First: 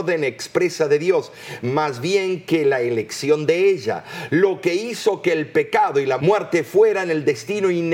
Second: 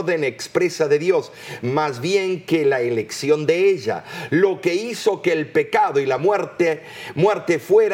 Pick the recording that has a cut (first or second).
first